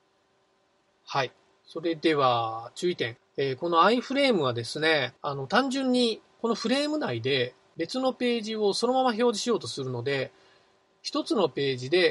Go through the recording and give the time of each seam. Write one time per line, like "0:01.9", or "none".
0:03.2
0:05.2